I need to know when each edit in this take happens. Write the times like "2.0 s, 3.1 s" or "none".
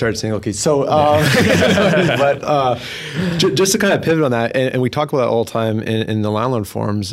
none